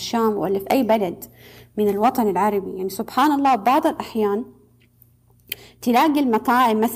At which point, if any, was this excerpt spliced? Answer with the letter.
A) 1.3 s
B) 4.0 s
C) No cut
C